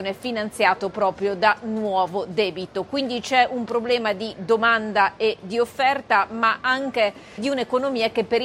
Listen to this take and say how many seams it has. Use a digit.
1